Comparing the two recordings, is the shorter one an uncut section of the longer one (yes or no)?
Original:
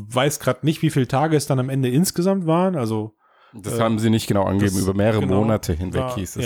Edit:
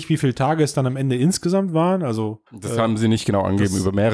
no